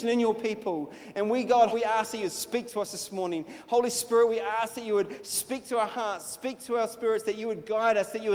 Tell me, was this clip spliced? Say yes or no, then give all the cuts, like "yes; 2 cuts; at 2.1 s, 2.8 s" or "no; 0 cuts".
yes; 1 cut; at 1.7 s